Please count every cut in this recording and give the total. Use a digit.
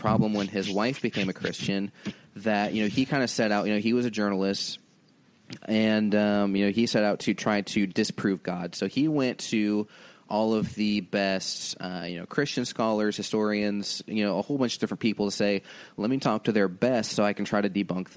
0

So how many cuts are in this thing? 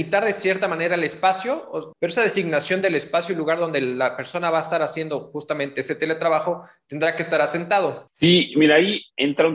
2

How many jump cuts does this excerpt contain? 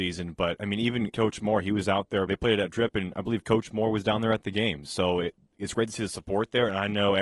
2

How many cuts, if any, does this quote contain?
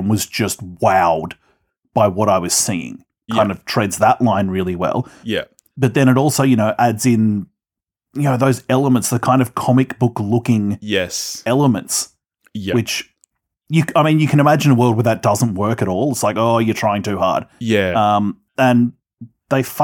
1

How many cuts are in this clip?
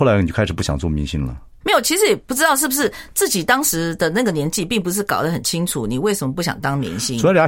1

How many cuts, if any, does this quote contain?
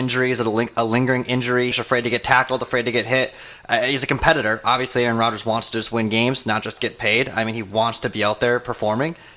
1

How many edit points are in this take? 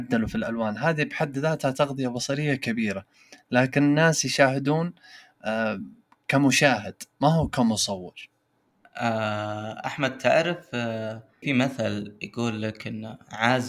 1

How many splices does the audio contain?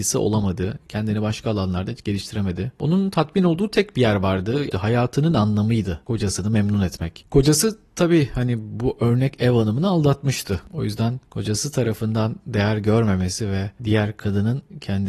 2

